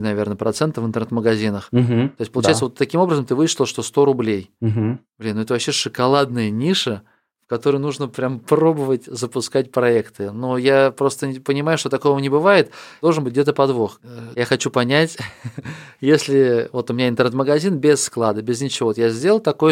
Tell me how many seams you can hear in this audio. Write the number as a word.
one